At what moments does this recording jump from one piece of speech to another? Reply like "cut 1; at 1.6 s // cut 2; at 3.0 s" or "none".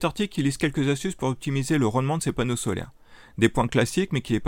none

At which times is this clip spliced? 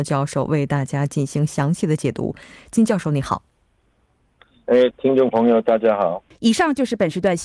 cut 1; at 4.9 s // cut 2; at 6.3 s

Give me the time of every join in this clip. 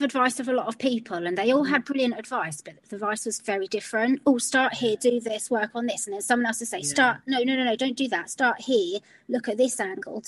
none

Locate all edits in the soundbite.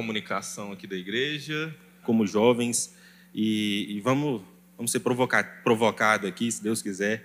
cut 1; at 2.0 s

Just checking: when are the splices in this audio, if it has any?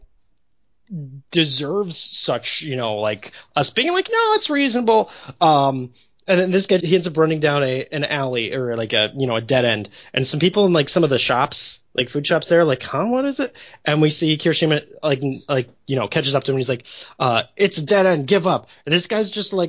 cut 1; at 6.8 s

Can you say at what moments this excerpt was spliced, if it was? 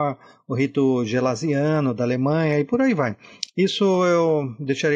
cut 1; at 3.5 s

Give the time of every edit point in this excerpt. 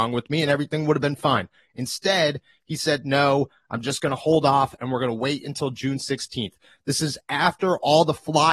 none

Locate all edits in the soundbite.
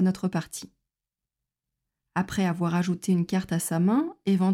none

